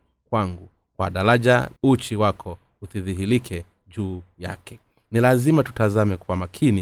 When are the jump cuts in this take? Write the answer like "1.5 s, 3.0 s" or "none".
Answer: 1.8 s